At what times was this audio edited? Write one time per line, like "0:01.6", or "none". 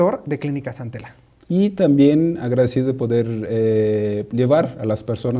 0:01.4